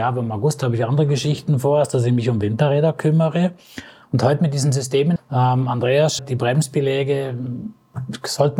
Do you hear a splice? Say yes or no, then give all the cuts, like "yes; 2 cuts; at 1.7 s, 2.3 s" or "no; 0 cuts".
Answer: yes; 3 cuts; at 4.0 s, 5.2 s, 6.2 s